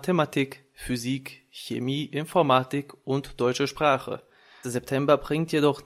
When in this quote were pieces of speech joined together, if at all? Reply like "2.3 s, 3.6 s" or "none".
4.6 s